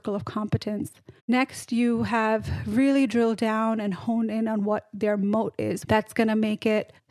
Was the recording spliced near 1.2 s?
yes; 2 cuts; at 1.2 s, 5.8 s

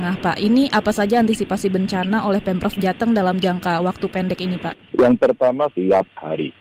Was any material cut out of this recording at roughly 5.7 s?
yes; 1 cut; at 5.7 s

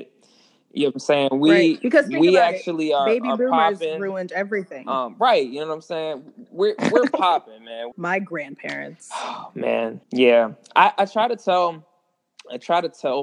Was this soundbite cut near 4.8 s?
no; 2 cuts; at 7.9 s, 10.0 s

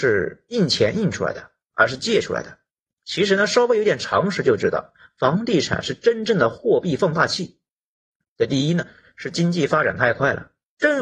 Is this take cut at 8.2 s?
yes; 2 cuts; at 3.0 s, 8.2 s

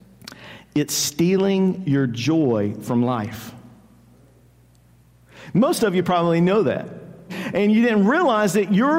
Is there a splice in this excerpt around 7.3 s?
yes; 1 cut; at 7.3 s

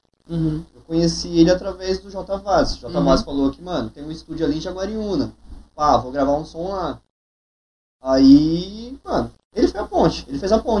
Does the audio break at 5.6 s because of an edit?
no; 0 cuts

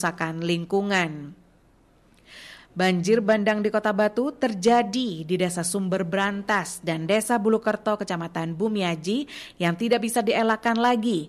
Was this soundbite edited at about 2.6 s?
yes; 1 cut; at 2.6 s

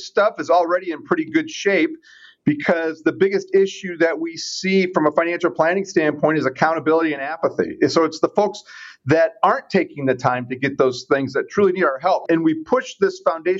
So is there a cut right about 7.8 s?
no; 1 cut; at 12.3 s

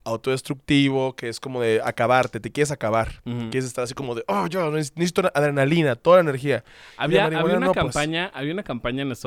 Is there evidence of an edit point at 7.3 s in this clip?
no; 0 cuts

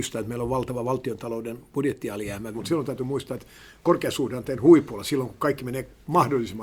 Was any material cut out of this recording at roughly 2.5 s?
yes; 1 cut; at 2.5 s

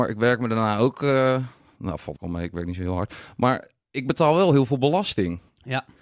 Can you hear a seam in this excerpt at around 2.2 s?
yes; 1 cut; at 2.2 s

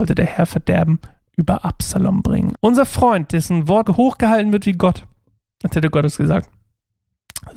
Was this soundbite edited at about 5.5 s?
no; 2 cuts; at 2.5 s, 3.8 s

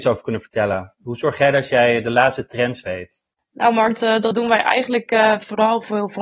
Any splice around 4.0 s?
yes; 1 cut; at 4.0 s

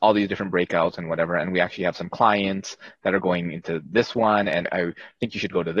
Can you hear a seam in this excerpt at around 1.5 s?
no; 1 cut; at 4.6 s

